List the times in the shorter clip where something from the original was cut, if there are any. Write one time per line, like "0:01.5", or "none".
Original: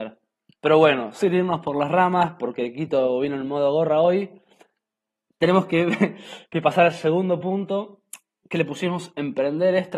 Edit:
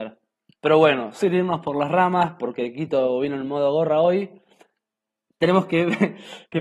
none